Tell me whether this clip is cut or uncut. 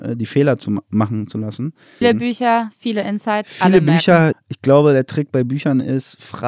cut